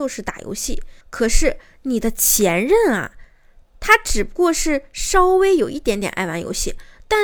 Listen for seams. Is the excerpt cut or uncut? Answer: cut